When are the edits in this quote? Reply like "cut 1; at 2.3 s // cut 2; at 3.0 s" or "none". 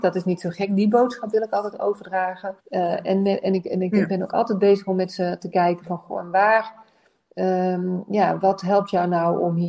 cut 1; at 2.6 s